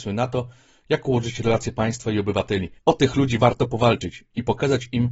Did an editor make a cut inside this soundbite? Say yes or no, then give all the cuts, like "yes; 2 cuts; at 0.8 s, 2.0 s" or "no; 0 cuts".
yes; 1 cut; at 2.8 s